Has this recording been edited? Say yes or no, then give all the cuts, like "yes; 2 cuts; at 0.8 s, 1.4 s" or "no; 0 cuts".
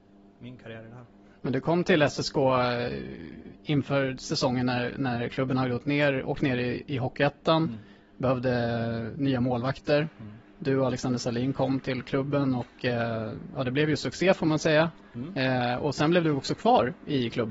no; 0 cuts